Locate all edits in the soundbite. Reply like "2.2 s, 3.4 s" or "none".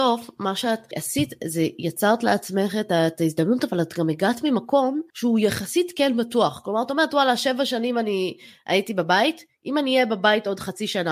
none